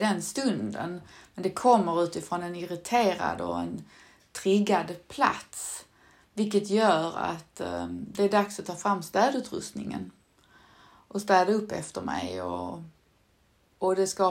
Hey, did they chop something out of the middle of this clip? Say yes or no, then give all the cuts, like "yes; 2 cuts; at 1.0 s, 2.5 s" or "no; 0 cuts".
no; 0 cuts